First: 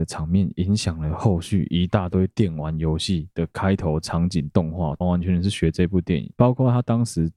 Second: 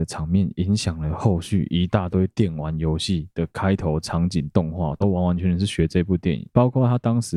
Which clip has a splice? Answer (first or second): first